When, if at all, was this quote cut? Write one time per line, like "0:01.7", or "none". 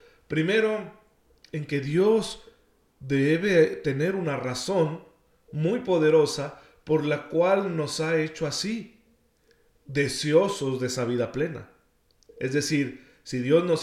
none